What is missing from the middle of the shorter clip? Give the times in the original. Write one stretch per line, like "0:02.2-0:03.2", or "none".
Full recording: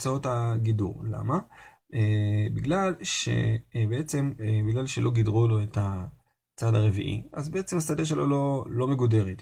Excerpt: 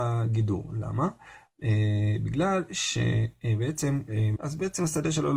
0:04.7-0:07.3

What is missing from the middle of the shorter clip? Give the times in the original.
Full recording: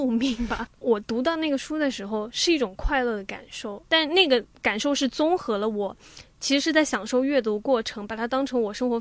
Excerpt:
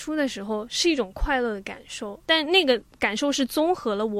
none

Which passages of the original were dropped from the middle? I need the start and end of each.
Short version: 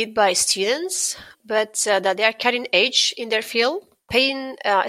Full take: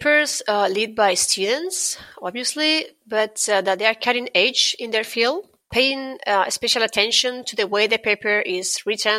0:02.1-0:02.9

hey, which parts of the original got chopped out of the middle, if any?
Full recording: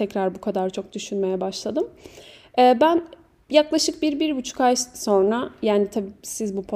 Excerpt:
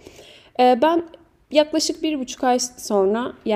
0:04.0-0:04.2

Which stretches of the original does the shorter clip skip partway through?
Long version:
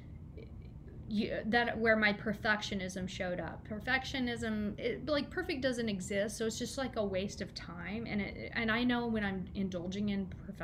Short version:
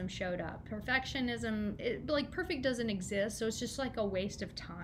none

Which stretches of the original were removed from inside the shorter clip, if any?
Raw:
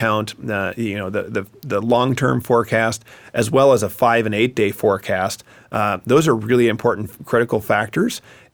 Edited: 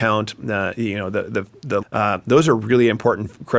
0:01.8-0:05.6

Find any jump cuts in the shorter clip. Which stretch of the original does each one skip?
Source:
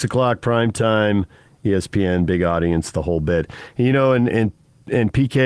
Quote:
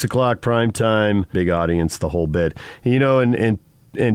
0:01.3-0:02.3

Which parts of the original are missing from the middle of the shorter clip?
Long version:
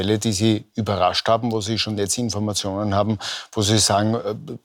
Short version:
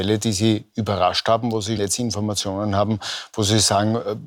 0:01.8-0:02.0

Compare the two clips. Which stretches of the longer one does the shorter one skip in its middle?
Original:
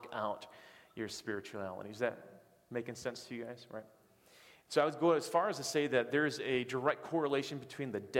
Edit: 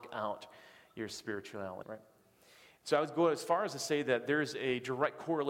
0:01.8-0:03.7

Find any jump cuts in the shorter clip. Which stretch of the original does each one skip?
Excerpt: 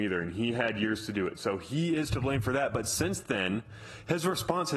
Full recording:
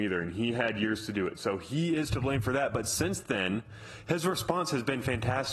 none

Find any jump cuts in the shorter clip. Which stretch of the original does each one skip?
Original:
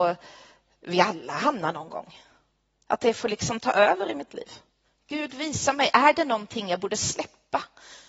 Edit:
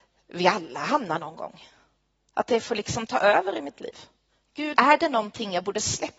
0:05.3-0:05.9

